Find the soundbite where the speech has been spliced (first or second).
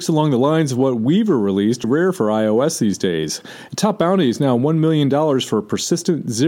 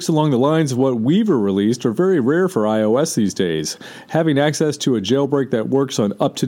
first